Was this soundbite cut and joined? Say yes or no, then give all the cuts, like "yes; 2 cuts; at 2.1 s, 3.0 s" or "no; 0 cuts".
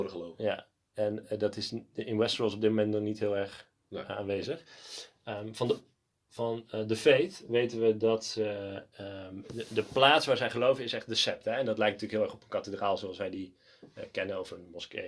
no; 0 cuts